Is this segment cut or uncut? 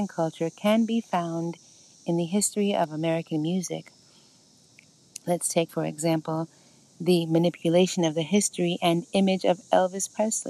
uncut